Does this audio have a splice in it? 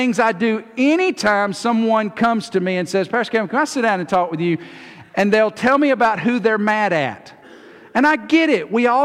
no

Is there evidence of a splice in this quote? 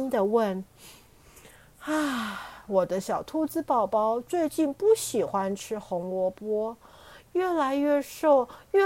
no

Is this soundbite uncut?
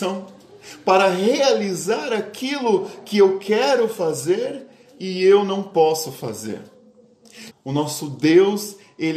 no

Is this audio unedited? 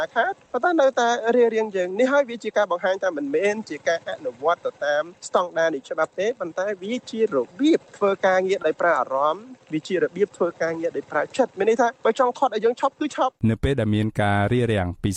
no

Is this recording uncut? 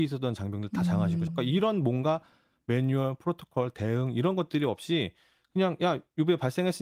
no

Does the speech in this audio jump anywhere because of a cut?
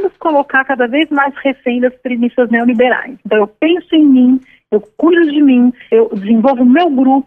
no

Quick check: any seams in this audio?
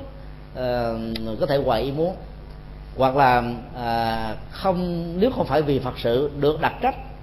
no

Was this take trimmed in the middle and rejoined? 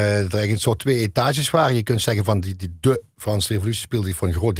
no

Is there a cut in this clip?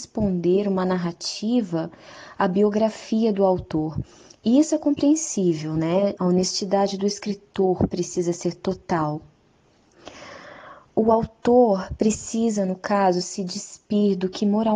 yes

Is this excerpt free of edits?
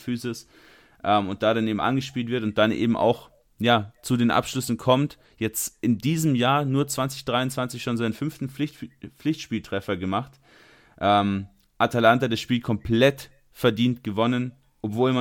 yes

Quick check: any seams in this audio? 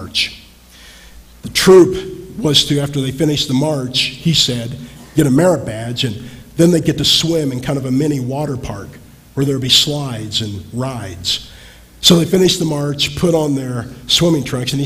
no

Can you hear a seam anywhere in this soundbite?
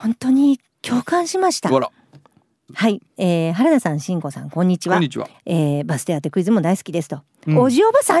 yes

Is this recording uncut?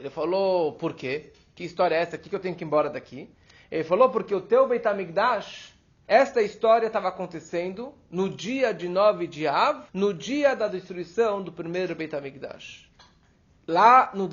no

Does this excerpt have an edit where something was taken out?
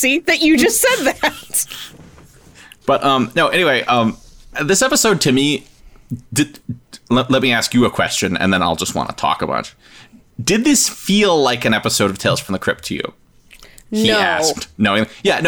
no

